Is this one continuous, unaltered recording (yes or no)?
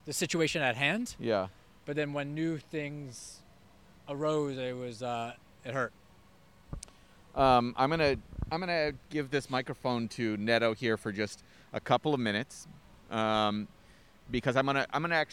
yes